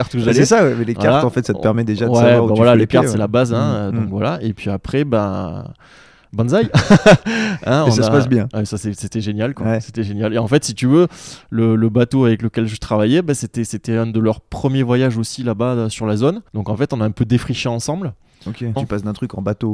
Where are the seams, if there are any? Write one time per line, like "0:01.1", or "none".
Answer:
0:16.5
0:18.8